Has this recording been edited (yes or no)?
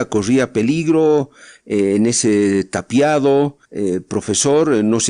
yes